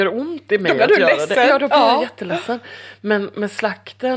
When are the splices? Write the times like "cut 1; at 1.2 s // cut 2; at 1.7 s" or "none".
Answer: none